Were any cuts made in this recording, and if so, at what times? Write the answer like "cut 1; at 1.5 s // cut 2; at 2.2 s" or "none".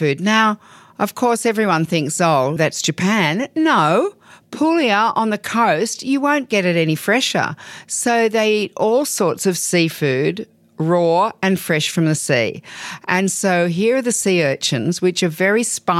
cut 1; at 2.6 s